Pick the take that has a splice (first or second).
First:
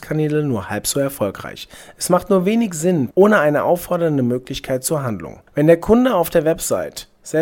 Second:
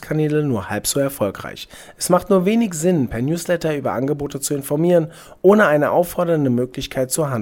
first